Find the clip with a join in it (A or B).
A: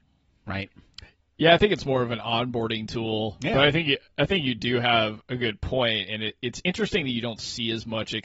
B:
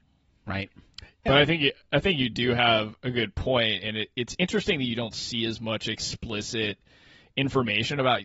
B